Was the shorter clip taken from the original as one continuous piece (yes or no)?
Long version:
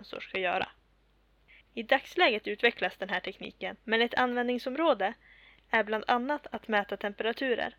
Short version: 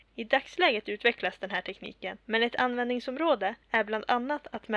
no